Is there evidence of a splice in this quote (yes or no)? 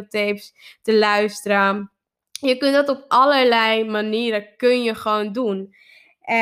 no